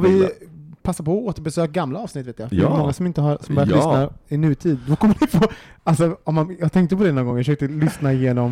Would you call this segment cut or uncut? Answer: uncut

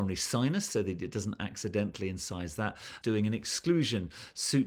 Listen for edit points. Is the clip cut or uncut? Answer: cut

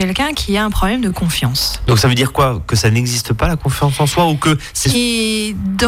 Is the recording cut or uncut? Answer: cut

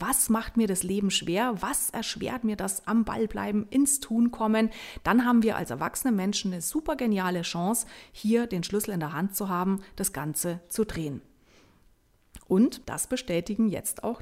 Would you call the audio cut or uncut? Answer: cut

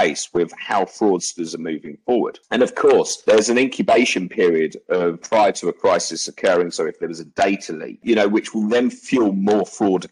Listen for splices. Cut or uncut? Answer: uncut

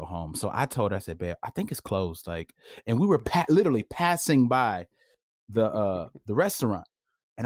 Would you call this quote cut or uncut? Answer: uncut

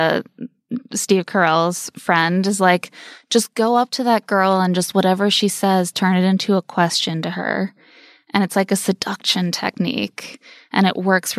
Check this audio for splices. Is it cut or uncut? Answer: uncut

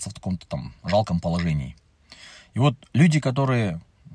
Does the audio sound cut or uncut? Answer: uncut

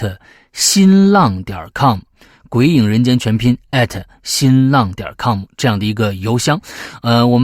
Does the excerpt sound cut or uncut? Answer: uncut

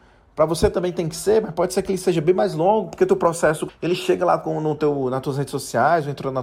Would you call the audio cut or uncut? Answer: cut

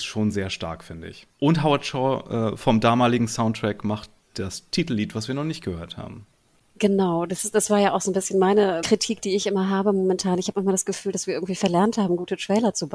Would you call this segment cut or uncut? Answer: uncut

